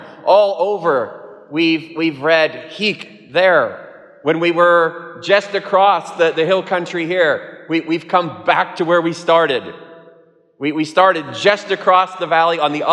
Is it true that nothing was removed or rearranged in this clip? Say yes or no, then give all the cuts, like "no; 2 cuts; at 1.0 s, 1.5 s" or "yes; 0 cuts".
yes; 0 cuts